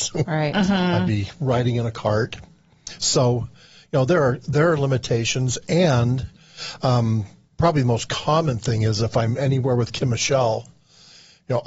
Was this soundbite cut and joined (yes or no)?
no